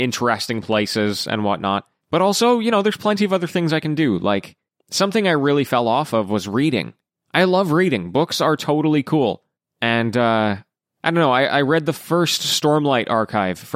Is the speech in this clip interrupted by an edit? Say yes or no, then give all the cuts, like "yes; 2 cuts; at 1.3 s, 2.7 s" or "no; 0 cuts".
yes; 1 cut; at 2.0 s